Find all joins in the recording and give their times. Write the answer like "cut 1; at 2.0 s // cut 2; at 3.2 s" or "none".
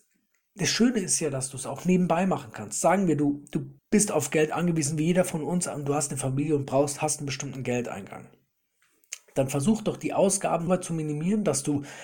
cut 1; at 3.8 s // cut 2; at 10.7 s